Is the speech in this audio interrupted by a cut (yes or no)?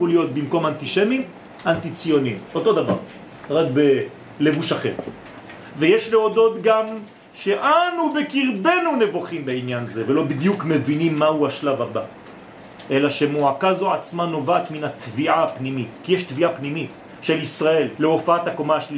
yes